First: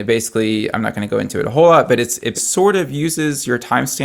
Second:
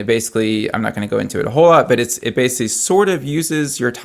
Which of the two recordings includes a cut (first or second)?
first